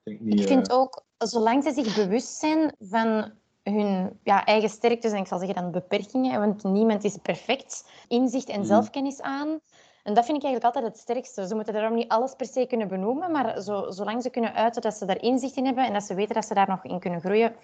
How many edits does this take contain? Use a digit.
1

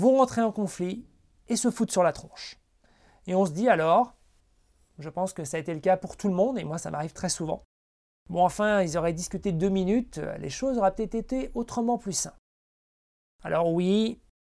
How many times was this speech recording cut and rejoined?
1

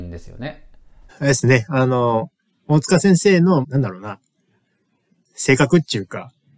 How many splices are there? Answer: 2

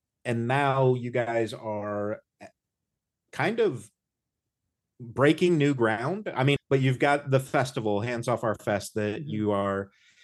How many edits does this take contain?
1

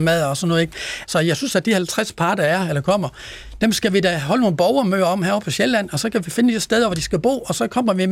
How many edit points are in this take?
1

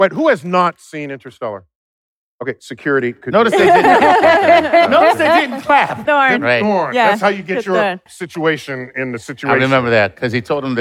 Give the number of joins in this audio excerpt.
2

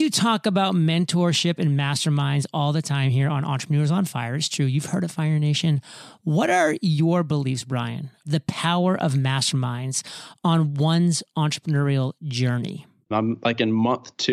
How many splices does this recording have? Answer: 2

